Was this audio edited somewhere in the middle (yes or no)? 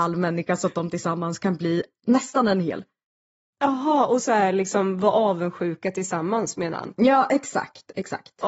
no